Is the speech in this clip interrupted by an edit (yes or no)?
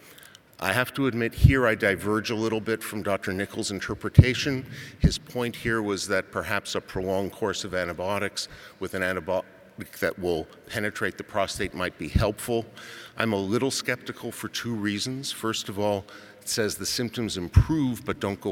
no